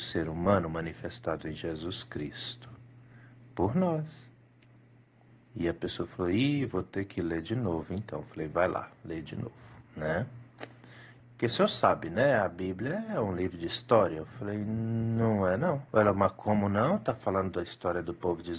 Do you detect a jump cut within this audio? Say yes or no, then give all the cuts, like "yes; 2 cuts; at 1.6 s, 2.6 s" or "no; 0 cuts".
yes; 3 cuts; at 9.9 s, 11.2 s, 15.9 s